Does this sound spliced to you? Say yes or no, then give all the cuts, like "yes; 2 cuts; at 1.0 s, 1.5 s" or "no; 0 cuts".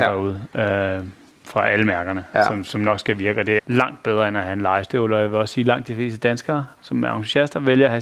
yes; 1 cut; at 3.6 s